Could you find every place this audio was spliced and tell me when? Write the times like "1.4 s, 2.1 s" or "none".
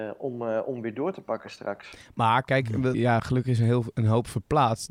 2.9 s